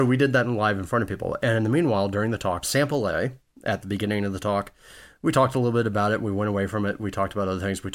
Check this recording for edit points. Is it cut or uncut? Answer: cut